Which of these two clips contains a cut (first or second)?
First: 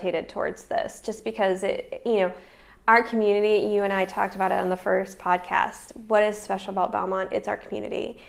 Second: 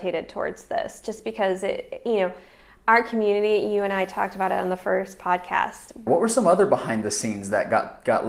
second